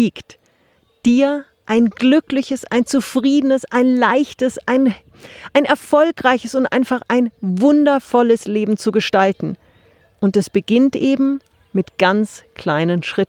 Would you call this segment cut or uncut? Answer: uncut